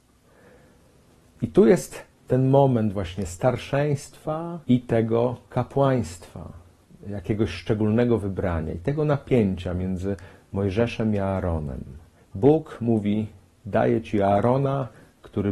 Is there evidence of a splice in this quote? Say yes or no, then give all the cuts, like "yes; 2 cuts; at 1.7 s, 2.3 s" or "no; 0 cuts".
yes; 2 cuts; at 4.6 s, 12.2 s